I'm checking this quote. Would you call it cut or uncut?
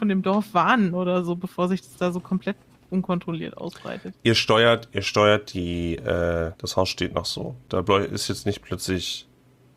cut